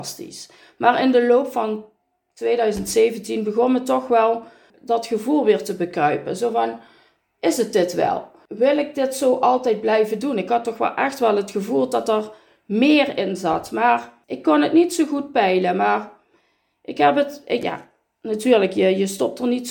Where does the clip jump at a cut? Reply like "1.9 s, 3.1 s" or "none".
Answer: 4.7 s

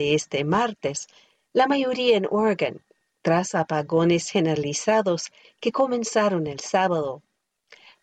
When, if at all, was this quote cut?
none

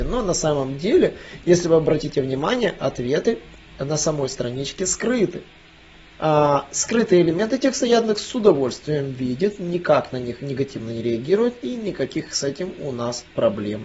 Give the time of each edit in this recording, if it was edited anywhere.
6.1 s

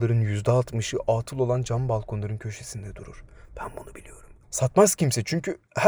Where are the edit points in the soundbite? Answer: 4.4 s

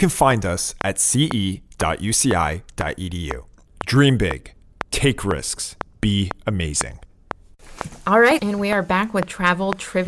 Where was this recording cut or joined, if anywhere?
8.4 s

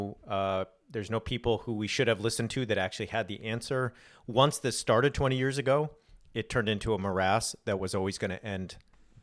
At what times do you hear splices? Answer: none

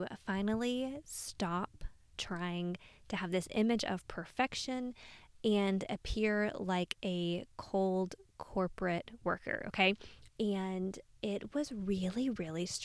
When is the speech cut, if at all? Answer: 10.3 s

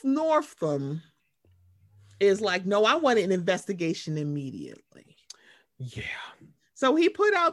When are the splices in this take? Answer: none

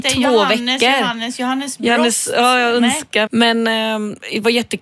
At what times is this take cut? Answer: 3.3 s

